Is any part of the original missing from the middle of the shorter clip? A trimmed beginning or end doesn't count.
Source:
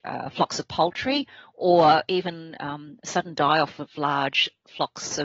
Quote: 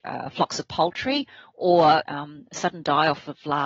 yes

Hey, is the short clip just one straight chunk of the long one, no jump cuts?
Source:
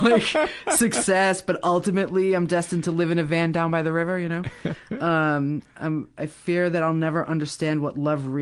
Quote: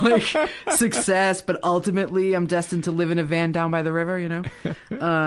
yes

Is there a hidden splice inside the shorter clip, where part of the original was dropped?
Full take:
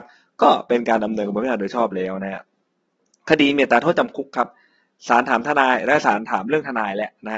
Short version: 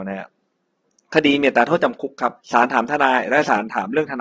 yes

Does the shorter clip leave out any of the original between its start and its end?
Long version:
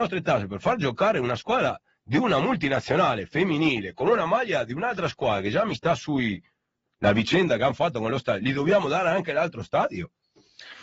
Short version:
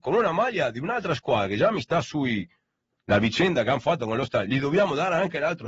no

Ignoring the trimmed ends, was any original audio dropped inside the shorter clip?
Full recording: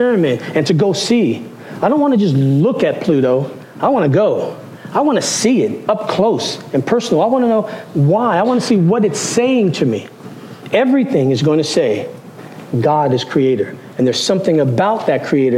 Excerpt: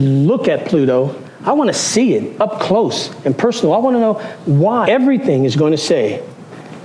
yes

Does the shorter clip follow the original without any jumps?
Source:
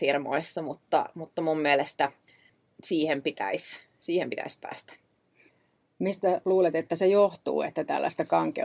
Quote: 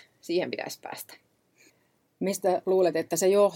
yes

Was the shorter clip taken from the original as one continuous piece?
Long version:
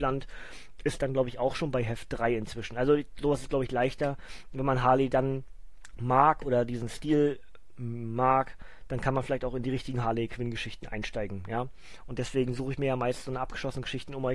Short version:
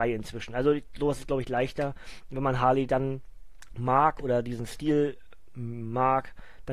yes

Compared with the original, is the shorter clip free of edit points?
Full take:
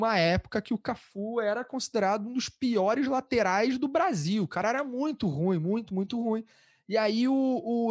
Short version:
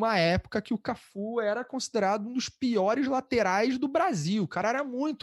yes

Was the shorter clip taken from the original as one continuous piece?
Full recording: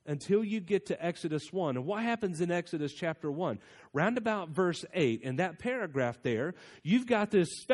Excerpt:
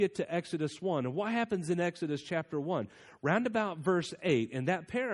yes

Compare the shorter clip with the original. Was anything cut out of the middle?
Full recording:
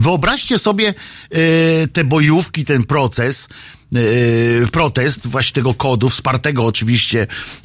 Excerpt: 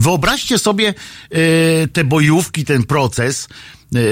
no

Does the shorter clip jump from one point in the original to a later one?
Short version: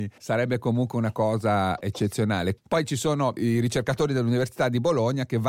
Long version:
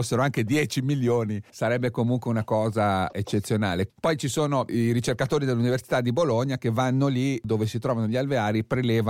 no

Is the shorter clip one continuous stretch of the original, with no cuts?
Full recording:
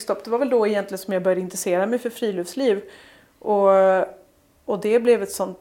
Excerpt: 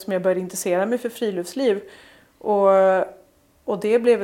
yes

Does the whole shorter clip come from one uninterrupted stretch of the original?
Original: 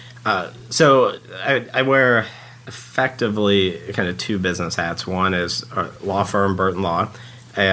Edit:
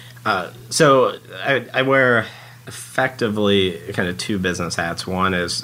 yes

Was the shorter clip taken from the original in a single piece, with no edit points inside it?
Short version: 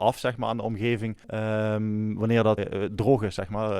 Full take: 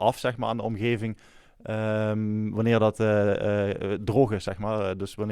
no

